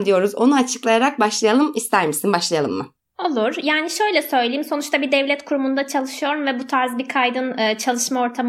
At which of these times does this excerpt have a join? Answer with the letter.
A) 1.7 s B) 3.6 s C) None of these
C